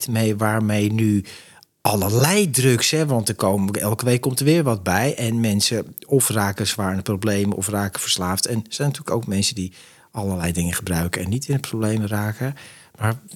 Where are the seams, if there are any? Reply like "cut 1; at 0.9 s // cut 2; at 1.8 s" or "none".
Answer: none